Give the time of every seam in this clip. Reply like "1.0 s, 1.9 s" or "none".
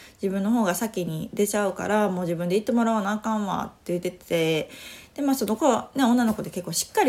4.0 s